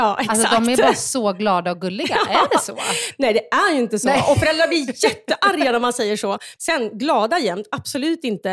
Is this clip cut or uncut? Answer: cut